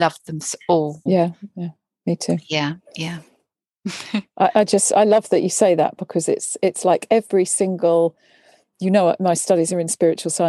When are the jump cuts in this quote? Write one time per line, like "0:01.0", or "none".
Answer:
0:01.1